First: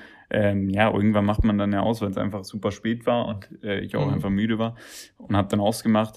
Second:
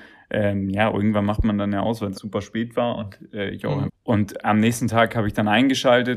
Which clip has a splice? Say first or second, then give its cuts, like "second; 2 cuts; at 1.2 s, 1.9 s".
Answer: second; 2 cuts; at 2.1 s, 3.9 s